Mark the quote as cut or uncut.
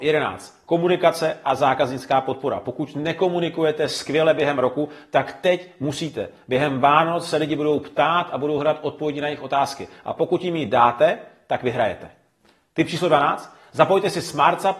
uncut